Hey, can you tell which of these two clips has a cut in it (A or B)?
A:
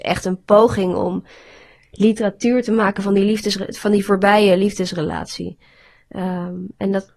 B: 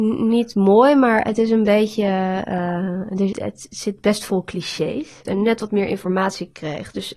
B